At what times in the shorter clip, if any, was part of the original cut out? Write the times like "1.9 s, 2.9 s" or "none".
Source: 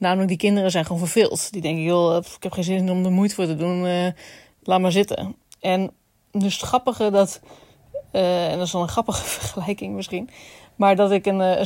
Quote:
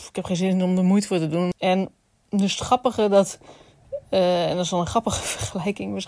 1.5 s